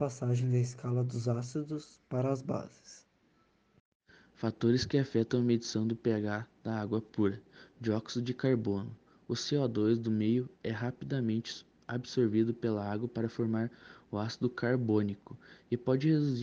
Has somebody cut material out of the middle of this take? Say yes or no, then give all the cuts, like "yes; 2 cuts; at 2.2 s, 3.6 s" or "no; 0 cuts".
no; 0 cuts